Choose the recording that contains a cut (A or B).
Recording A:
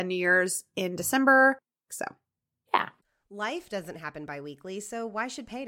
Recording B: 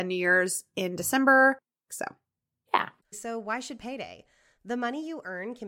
B